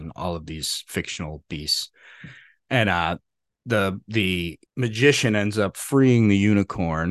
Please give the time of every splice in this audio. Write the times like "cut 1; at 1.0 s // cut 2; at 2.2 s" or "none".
cut 1; at 4.7 s